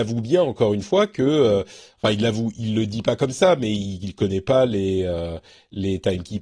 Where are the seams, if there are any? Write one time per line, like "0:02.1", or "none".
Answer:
none